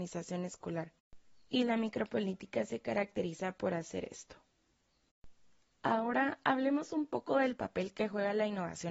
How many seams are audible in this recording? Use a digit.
0